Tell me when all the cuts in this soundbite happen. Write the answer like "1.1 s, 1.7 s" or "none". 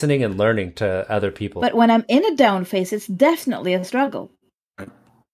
1.6 s